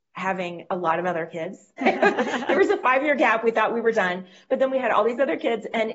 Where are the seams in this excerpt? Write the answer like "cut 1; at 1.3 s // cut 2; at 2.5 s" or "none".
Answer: cut 1; at 1.8 s

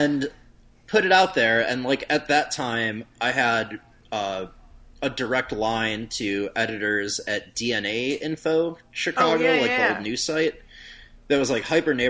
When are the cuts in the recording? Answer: none

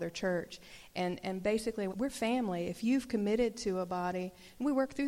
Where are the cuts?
cut 1; at 1.9 s

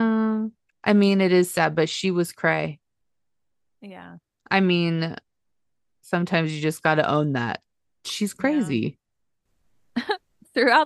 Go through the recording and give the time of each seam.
none

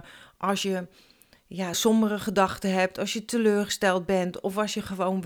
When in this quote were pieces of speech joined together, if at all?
cut 1; at 1.7 s

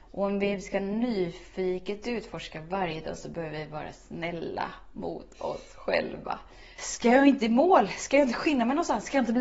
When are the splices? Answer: cut 1; at 6.8 s

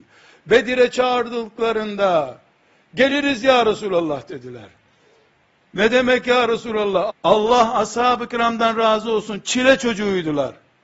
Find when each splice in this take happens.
cut 1; at 7.1 s

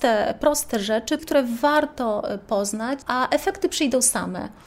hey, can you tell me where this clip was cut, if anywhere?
cut 1; at 1.2 s // cut 2; at 3.0 s

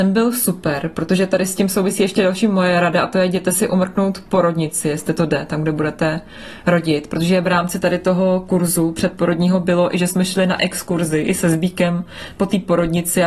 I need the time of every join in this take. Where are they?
none

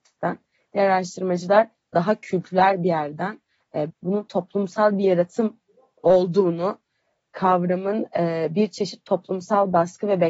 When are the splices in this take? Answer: cut 1; at 3.9 s

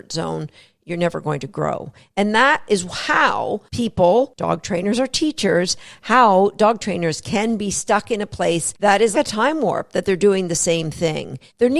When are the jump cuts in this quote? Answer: cut 1; at 4.3 s // cut 2; at 9.1 s

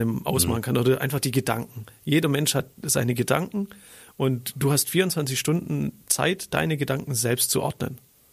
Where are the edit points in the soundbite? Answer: none

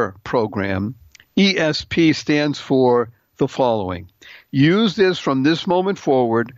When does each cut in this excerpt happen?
cut 1; at 4.5 s

